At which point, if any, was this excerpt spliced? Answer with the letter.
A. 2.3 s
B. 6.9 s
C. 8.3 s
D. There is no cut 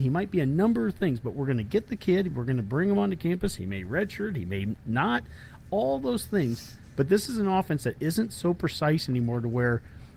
D